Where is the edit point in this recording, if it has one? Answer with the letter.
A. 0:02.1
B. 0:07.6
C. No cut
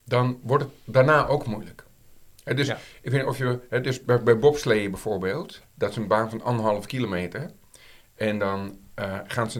C